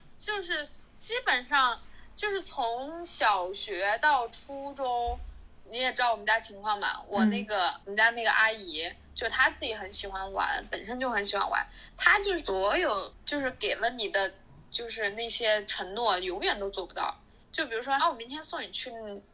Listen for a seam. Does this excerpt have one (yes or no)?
yes